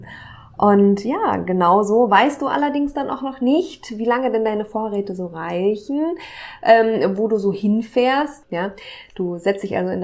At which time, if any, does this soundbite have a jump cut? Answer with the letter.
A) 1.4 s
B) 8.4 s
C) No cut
B